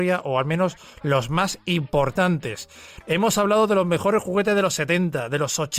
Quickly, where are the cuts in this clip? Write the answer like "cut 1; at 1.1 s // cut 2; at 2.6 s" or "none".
cut 1; at 3.0 s